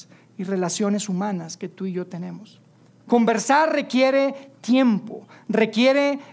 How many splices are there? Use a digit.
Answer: 1